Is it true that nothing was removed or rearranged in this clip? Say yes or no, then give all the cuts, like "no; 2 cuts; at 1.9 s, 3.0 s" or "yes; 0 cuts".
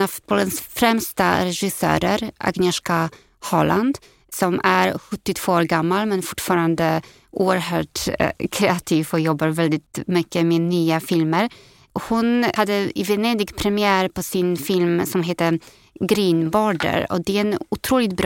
yes; 0 cuts